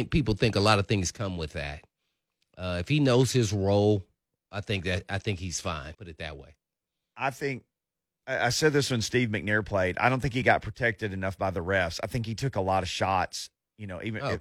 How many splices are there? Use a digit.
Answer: 1